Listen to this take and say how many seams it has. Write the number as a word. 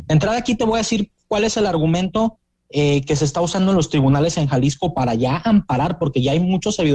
zero